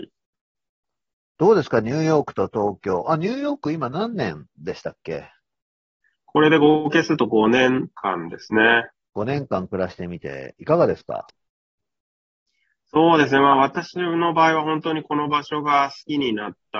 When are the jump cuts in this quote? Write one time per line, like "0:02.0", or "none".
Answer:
0:09.1